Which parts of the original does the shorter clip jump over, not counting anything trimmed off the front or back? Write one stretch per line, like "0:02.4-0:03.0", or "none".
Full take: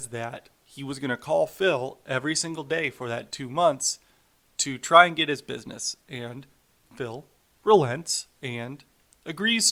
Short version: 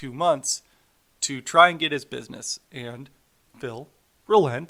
none